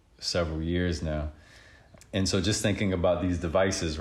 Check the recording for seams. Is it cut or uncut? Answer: uncut